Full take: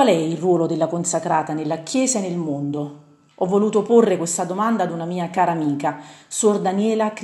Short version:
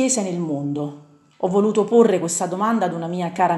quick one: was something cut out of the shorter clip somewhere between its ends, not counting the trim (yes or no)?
no